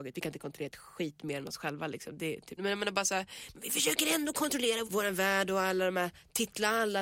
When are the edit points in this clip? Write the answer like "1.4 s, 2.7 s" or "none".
2.6 s, 4.9 s